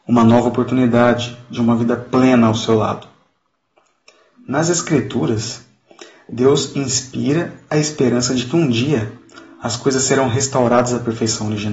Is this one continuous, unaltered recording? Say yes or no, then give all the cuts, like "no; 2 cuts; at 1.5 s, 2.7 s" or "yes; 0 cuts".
yes; 0 cuts